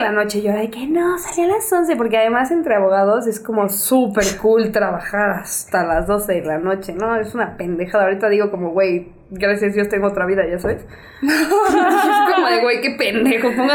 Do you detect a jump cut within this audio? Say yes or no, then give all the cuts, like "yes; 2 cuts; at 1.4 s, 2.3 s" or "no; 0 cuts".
no; 0 cuts